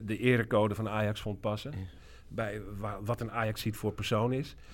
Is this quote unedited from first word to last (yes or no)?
yes